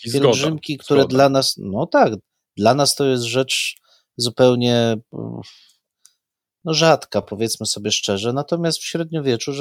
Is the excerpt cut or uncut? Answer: uncut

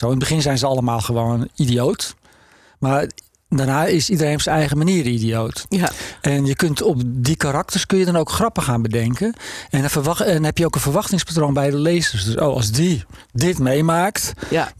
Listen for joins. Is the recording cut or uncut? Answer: uncut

